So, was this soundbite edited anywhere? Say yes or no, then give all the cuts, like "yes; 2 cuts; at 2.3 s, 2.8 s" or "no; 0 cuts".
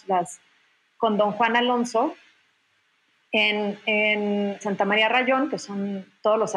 yes; 1 cut; at 4.6 s